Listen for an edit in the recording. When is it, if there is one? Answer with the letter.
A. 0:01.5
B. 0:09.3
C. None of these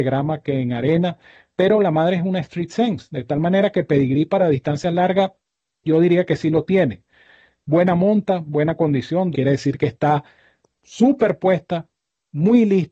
B